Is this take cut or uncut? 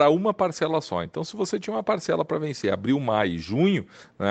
uncut